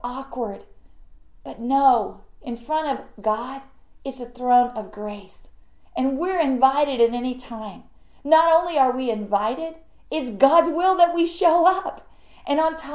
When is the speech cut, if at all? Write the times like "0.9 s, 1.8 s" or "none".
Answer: none